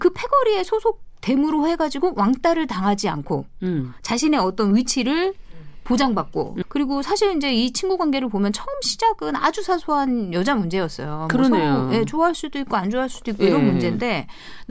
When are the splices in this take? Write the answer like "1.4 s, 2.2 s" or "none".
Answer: 6.6 s